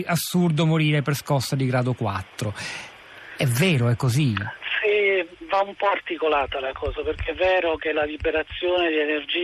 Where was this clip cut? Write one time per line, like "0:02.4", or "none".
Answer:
none